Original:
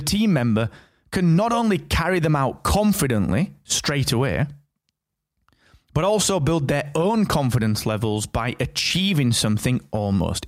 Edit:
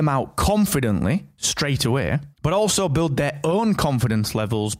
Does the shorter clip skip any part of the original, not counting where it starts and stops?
yes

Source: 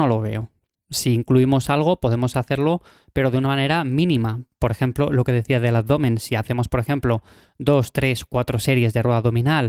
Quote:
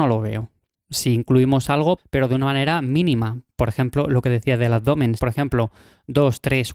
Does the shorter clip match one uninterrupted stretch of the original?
no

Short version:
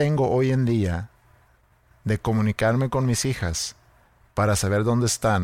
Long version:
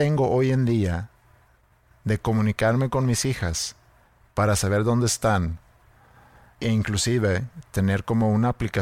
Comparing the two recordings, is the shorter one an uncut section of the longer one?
yes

